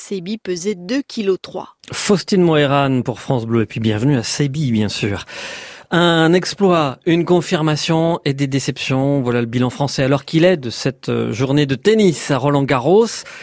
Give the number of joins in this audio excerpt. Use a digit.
0